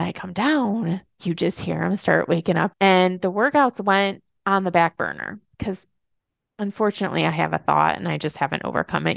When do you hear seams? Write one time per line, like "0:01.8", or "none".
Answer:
0:02.7